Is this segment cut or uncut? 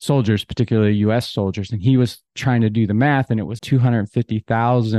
cut